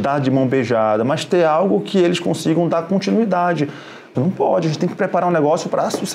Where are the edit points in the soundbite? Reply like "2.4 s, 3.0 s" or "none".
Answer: 4.1 s